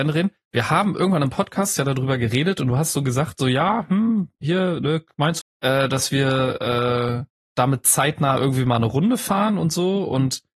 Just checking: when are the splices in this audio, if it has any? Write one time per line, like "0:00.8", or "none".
0:05.4
0:07.4